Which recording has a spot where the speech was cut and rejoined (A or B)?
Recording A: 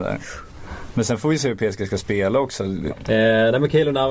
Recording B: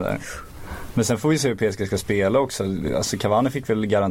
A